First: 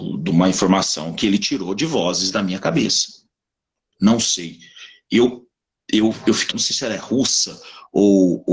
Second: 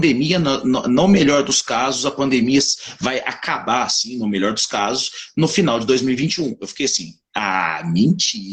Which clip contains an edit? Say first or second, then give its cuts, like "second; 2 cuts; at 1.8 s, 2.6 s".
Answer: first; 2 cuts; at 3.9 s, 6.5 s